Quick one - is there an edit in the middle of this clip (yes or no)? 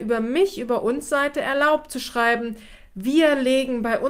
no